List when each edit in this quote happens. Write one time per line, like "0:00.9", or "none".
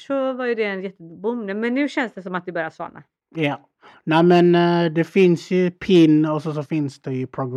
none